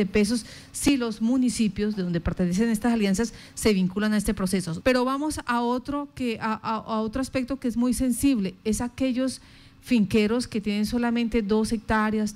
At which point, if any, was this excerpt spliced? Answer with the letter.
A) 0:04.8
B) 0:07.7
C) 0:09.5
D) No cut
A